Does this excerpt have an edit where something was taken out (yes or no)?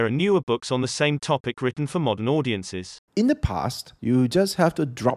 yes